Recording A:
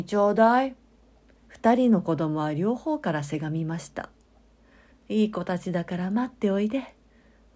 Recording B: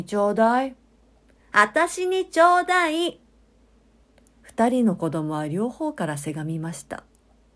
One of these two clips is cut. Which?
A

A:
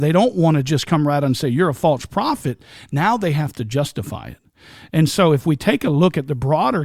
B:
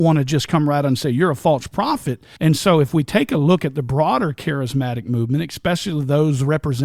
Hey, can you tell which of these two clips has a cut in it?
B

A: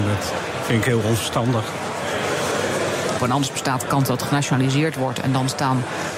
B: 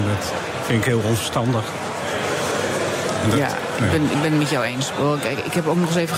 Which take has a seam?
A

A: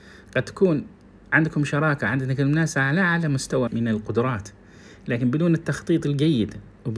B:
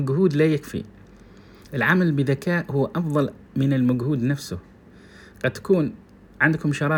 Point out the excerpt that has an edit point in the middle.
A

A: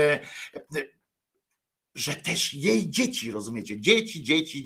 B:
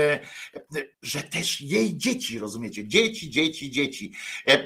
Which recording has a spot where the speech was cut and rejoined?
B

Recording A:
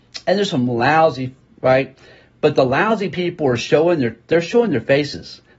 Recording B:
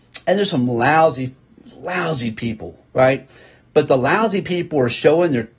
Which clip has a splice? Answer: A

